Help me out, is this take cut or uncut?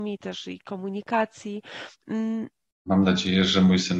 cut